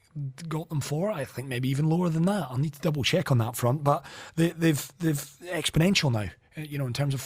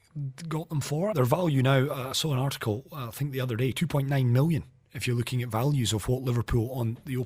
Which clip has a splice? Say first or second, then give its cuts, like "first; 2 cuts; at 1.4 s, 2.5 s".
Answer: second; 1 cut; at 1.1 s